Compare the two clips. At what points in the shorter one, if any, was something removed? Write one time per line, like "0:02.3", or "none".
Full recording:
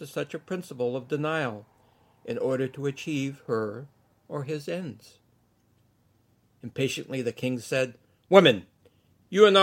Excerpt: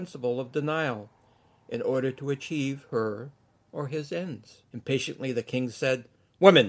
0:04.6